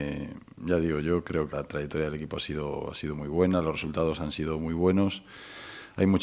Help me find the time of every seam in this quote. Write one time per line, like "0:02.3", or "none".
0:01.5